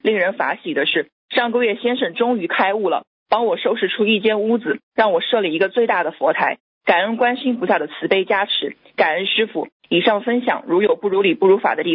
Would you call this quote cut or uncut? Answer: uncut